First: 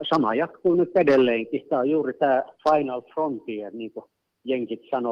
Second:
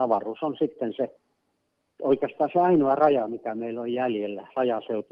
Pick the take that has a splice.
first; 1 cut; at 2.6 s

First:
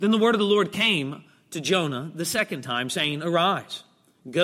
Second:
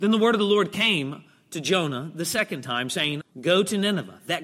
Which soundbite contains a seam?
second; 1 cut; at 3.2 s

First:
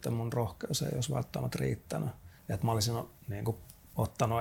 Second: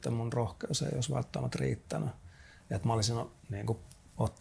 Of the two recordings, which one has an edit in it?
first; 1 cut; at 2.4 s

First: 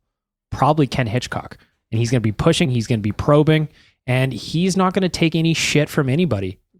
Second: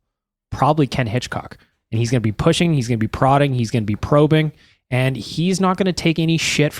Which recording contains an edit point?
first; 1 cut; at 2.6 s

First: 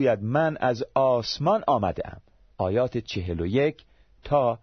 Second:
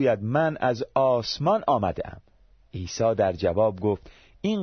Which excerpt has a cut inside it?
first; 1 cut; at 2.5 s

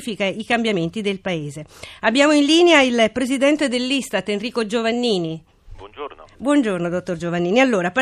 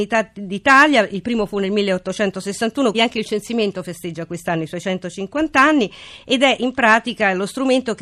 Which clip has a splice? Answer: second; 1 cut; at 2.9 s

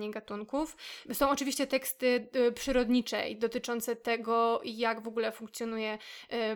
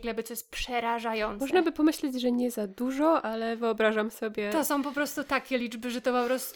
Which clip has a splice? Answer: first; 1 cut; at 1.0 s

